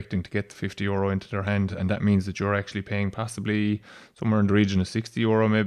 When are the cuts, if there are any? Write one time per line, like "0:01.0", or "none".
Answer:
none